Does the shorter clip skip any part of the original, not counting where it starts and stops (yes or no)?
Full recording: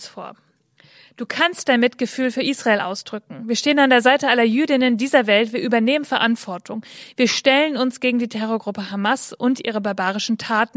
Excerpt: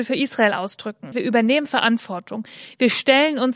yes